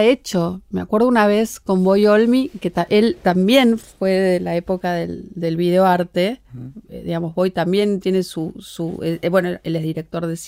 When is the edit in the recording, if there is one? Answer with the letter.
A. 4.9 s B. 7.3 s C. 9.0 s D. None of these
D